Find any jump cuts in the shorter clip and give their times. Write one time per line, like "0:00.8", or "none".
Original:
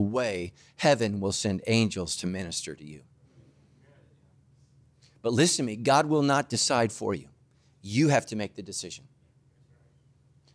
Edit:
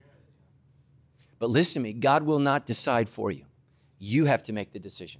none

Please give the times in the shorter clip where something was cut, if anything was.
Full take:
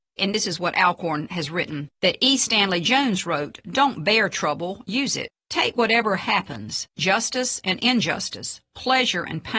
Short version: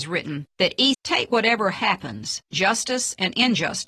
0:00.9

